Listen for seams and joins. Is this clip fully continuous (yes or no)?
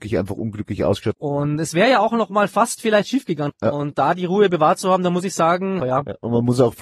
no